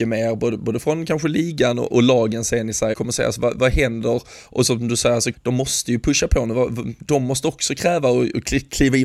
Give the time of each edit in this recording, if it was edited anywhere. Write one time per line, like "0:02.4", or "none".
0:02.9
0:05.3

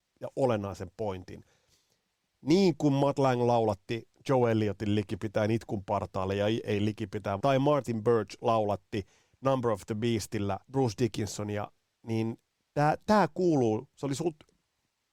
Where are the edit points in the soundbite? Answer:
0:07.4
0:10.6

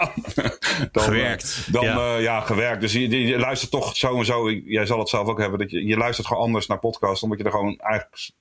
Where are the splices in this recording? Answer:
0:05.8

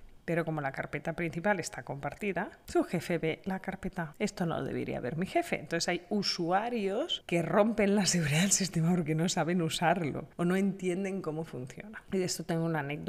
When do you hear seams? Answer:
none

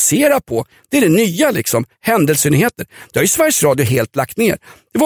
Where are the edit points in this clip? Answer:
none

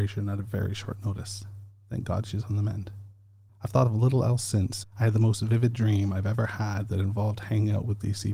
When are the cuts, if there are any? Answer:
0:03.5
0:04.8

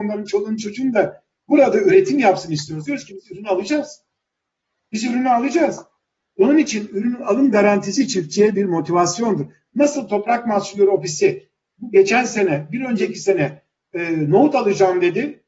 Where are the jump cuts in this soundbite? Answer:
none

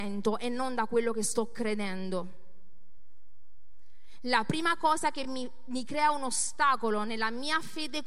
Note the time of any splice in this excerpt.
none

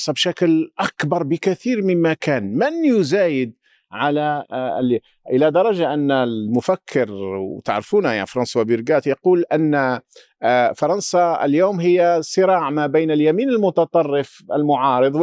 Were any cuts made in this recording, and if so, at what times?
none

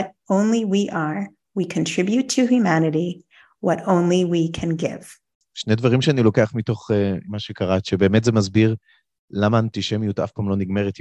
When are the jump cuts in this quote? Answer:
0:07.2

